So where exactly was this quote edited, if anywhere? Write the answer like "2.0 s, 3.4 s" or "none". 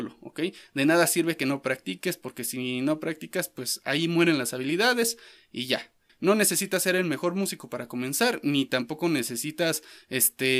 6.1 s

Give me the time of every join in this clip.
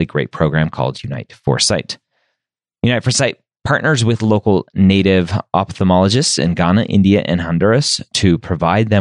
none

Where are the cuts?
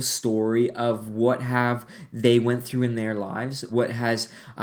3.7 s

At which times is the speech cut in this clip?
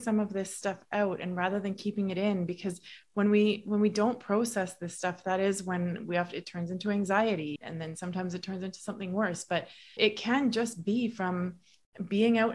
7.6 s, 10.0 s

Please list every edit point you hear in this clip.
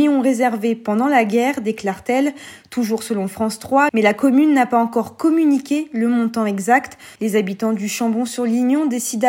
3.9 s, 7.2 s

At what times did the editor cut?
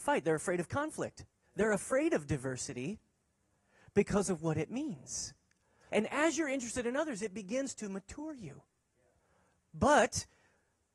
5.9 s

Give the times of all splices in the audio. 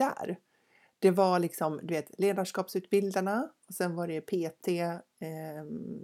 none

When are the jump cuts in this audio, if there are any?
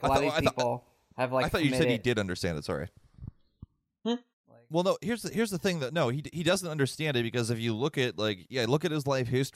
4.3 s

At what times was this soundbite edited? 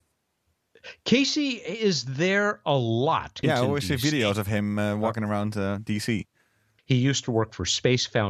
3.4 s, 6.8 s

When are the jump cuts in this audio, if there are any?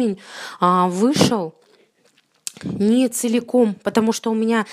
none

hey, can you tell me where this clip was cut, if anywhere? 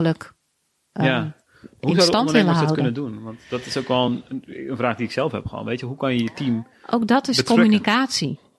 none

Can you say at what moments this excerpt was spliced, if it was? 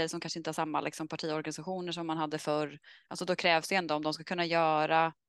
none

